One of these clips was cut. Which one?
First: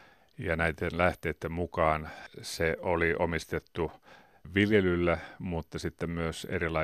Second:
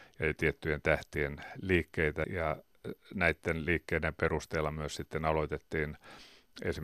second; 1 cut; at 2.2 s

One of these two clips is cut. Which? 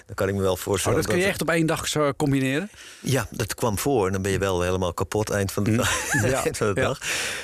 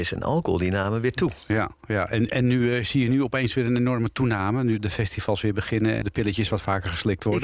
second; 2 cuts; at 4.8 s, 6.0 s

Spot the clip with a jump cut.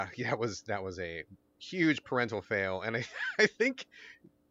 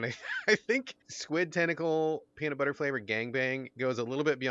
second; 1 cut; at 1.0 s

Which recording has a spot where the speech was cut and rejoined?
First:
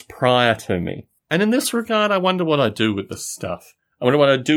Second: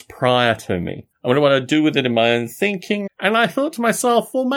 second; 2 cuts; at 1.1 s, 3.1 s

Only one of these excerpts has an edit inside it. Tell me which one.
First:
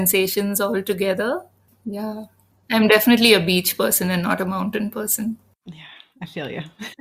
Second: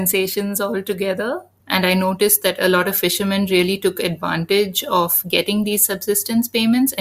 second; 1 cut; at 1.6 s

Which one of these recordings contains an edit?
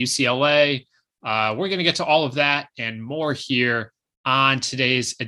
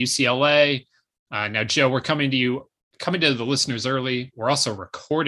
second; 1 cut; at 1.1 s

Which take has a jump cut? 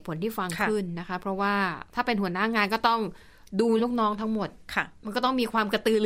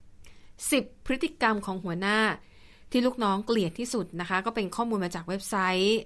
first; 2 cuts; at 1.9 s, 3.8 s

